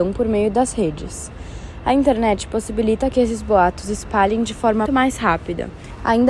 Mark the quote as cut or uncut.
cut